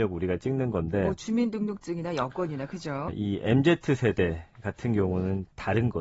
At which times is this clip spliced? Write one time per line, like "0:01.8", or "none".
0:03.1